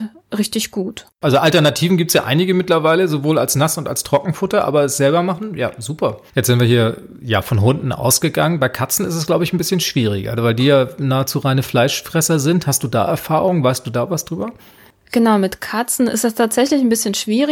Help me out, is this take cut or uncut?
uncut